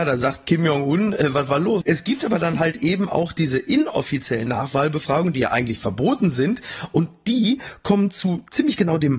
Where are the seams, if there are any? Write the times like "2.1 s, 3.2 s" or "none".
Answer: 1.8 s